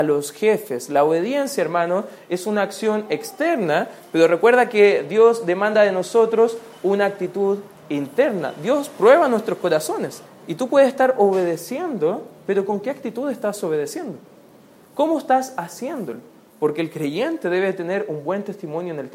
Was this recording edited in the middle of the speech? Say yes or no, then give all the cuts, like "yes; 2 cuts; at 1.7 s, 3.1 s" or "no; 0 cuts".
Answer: yes; 2 cuts; at 10.3 s, 16.5 s